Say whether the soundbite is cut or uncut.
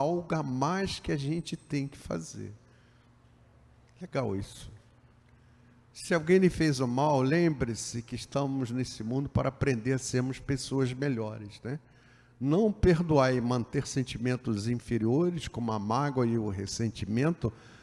uncut